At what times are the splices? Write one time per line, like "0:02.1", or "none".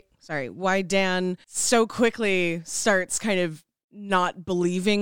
0:01.4